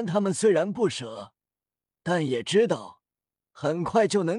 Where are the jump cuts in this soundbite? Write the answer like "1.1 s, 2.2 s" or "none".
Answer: none